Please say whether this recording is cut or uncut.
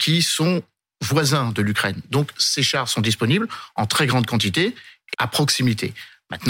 cut